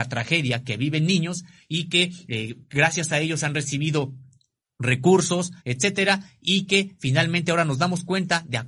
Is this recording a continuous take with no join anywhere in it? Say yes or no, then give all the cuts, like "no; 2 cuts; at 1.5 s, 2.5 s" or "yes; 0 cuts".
no; 1 cut; at 5.6 s